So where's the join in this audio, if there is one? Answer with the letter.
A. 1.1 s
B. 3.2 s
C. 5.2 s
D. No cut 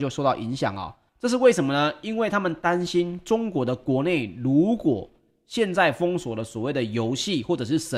A